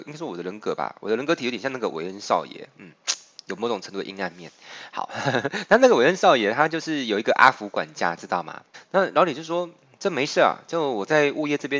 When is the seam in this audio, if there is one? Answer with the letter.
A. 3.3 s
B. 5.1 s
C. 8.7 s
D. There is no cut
C